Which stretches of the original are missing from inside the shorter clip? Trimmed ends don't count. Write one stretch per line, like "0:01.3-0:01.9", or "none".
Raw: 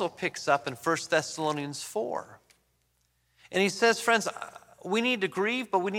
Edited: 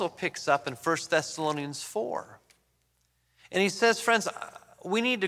none